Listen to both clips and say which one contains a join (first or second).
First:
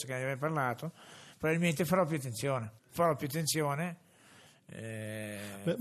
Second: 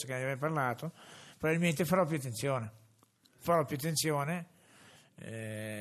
first